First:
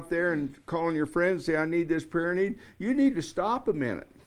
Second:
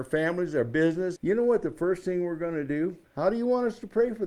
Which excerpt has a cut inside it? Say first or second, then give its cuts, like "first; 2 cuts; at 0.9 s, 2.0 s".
second; 2 cuts; at 1.2 s, 3.0 s